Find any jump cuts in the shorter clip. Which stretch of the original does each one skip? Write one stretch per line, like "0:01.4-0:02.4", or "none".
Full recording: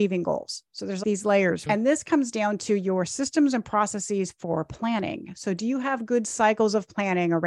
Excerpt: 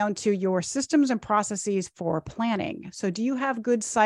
none